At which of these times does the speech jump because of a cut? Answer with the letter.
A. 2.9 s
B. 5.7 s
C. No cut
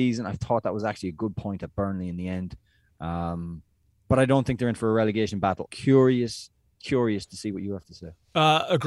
B